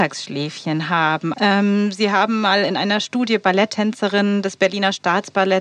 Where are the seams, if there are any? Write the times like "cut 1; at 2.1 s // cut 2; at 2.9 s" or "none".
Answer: cut 1; at 1.3 s